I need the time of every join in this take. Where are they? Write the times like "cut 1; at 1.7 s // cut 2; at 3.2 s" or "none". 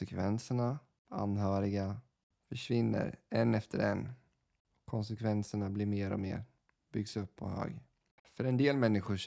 none